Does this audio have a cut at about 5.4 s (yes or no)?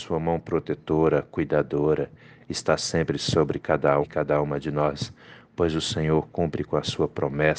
no